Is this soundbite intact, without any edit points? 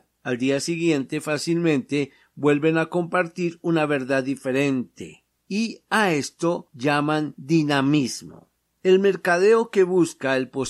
yes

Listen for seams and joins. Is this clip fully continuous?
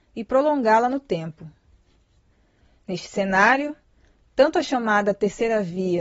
yes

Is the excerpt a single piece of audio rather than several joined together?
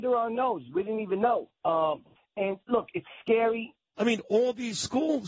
no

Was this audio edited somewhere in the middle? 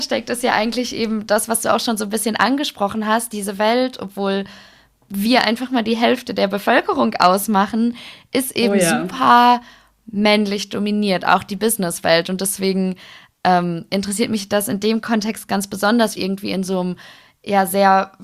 yes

